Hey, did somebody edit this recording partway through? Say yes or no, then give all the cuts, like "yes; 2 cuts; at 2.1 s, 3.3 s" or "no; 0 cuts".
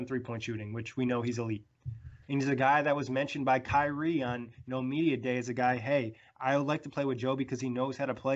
yes; 1 cut; at 2.2 s